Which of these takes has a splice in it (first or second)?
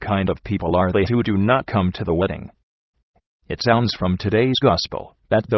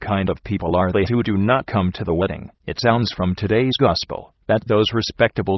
second